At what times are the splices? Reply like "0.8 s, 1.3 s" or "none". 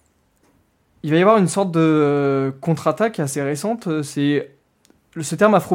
none